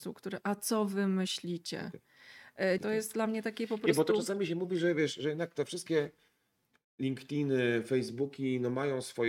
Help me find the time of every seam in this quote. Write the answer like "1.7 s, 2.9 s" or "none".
2.8 s